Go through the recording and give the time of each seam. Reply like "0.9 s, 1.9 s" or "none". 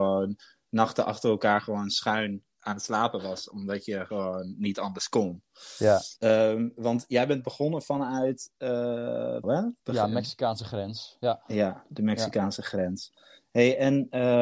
6.2 s, 9.4 s